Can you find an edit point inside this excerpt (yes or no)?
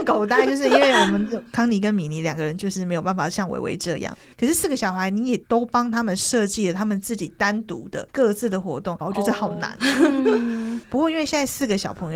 yes